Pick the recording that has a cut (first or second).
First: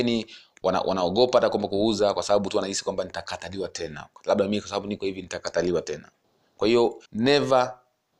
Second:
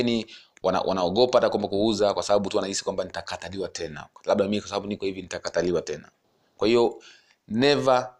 first